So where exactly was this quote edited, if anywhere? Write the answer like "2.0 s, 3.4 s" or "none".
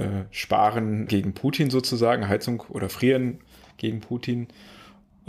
1.1 s